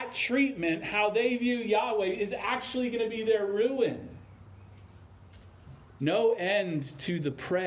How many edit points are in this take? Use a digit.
1